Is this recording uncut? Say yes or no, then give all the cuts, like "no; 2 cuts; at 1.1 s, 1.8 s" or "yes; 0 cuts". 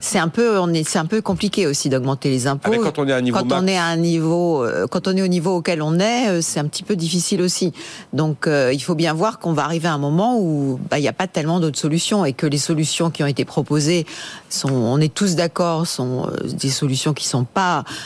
yes; 0 cuts